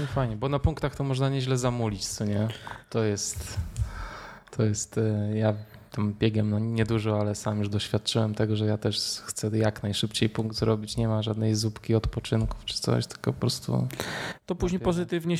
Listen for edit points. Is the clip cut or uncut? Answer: uncut